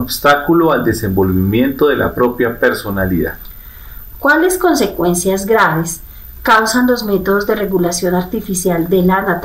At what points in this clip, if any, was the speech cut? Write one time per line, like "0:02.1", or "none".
none